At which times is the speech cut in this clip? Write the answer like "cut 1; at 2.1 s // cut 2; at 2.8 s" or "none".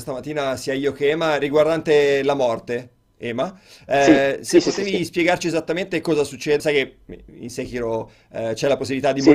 cut 1; at 6.6 s